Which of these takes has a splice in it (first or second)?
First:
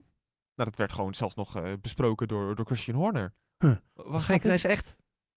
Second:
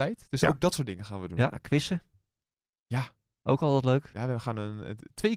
first